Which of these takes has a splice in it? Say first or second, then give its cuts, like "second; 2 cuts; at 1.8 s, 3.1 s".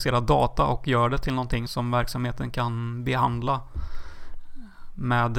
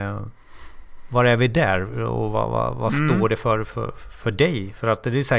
first; 1 cut; at 1.7 s